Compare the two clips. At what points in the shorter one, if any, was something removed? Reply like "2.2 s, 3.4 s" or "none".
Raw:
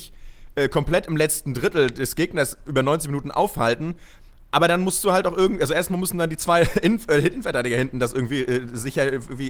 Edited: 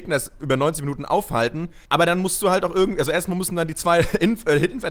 1.9 s